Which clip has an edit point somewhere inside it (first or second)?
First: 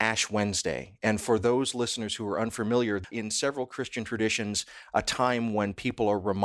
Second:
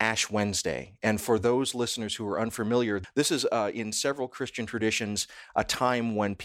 first